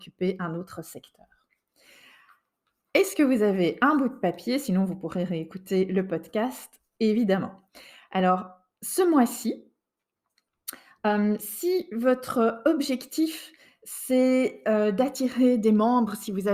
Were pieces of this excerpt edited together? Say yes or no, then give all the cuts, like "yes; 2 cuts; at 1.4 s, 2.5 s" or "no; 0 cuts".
no; 0 cuts